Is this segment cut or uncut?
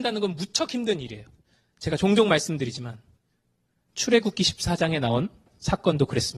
uncut